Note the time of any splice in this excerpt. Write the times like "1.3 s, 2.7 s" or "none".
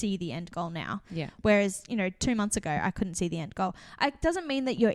none